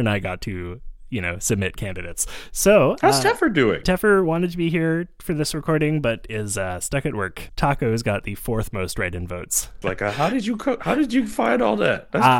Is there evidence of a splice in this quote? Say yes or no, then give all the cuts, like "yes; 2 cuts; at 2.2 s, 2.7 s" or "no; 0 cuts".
yes; 3 cuts; at 3.8 s, 7.5 s, 9.8 s